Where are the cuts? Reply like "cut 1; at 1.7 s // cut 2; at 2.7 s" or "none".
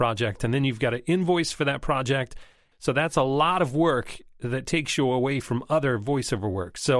cut 1; at 2.7 s

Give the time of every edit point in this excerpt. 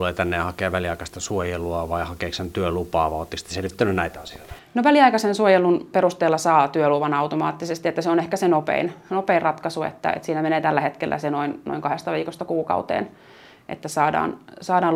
none

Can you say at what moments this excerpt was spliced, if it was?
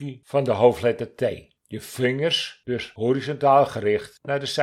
cut 1; at 1.6 s

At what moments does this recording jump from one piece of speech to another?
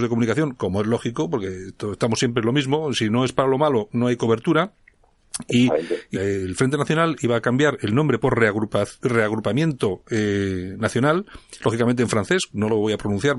cut 1; at 6.1 s

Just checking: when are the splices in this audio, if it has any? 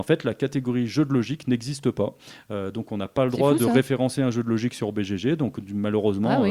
none

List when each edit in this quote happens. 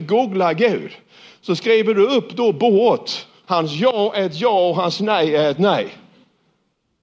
cut 1; at 3.4 s

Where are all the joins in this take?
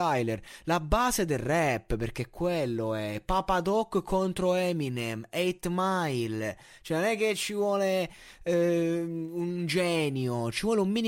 none

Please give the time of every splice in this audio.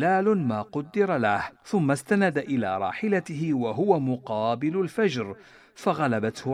cut 1; at 1.5 s

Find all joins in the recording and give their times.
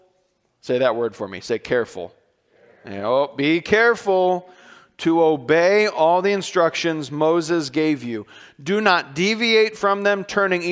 none

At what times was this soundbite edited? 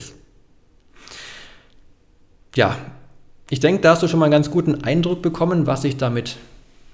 none

